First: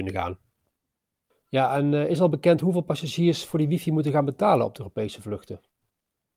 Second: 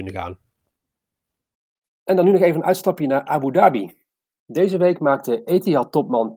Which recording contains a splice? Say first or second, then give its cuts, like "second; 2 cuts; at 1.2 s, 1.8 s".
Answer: first; 1 cut; at 1.3 s